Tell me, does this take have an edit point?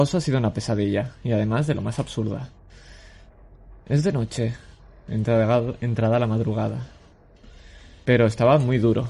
yes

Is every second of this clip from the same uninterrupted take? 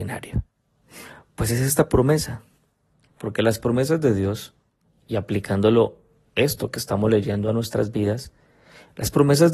yes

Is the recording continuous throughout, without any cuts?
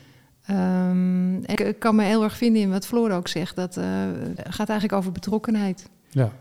no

